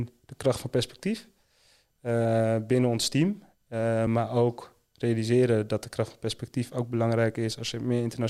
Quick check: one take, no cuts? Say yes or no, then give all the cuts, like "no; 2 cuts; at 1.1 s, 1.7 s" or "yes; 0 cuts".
yes; 0 cuts